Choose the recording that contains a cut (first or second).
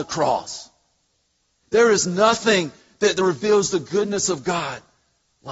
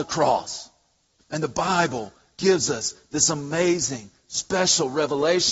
second